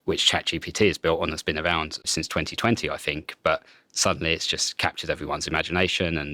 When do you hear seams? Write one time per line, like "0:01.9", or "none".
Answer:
0:02.0